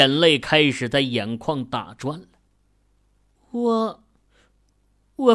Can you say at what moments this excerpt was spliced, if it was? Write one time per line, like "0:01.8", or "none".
0:03.4